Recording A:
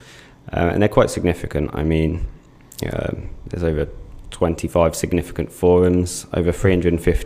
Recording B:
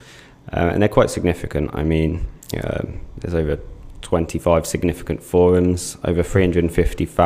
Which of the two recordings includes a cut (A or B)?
B